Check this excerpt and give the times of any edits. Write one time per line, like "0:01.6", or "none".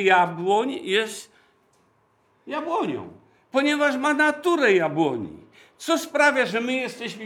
none